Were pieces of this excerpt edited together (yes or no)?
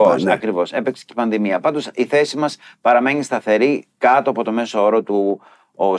no